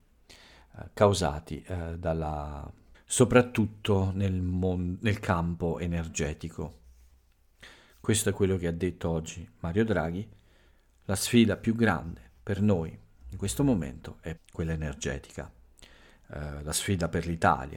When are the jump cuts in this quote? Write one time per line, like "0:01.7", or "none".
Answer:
0:02.9
0:14.4